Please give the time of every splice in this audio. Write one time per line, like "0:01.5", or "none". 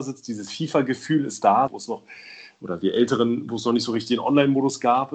0:01.7